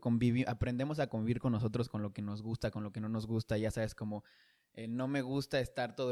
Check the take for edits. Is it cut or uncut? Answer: uncut